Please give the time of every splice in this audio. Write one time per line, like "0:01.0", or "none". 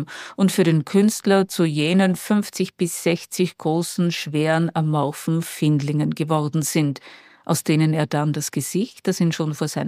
none